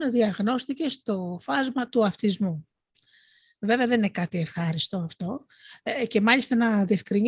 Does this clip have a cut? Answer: no; 0 cuts

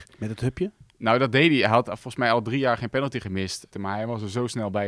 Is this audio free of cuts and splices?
no; 2 cuts; at 0.9 s, 3.7 s

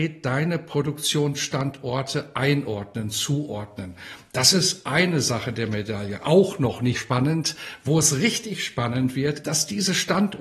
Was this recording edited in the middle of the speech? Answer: yes; 2 cuts; at 6.9 s, 9.4 s

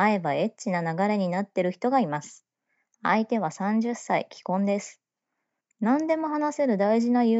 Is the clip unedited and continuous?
no; 1 cut; at 5.6 s

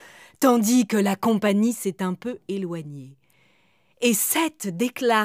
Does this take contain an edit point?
no; 0 cuts

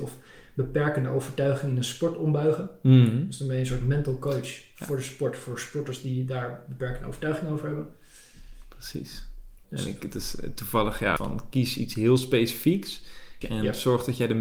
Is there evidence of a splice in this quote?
yes; 3 cuts; at 9.6 s, 11.2 s, 13.4 s

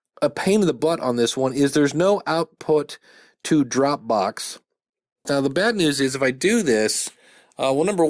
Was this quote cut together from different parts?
yes; 1 cut; at 5.3 s

